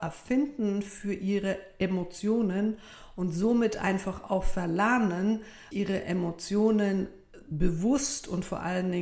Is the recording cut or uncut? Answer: cut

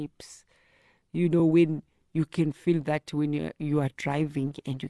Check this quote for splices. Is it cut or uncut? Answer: uncut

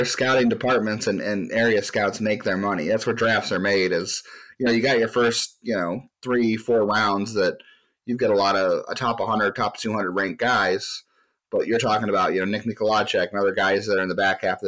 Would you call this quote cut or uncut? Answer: uncut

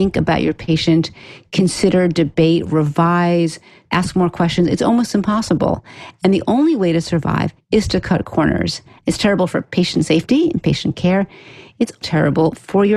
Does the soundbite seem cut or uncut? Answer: cut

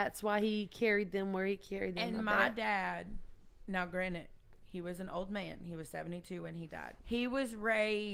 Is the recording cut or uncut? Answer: cut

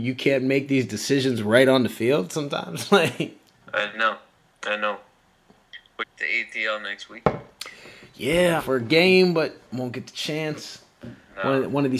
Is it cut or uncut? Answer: cut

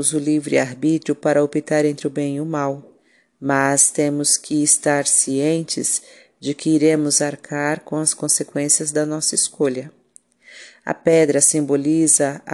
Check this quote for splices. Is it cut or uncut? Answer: uncut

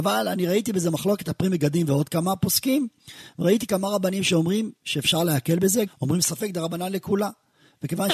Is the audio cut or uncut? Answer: cut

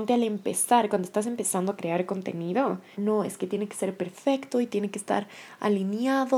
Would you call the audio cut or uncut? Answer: cut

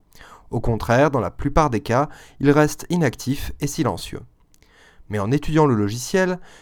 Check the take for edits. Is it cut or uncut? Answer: uncut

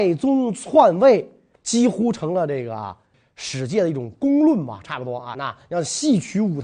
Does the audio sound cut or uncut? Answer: cut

